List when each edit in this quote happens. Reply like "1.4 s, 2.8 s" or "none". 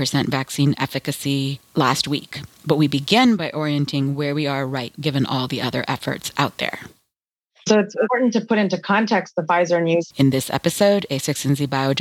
4.9 s, 10.1 s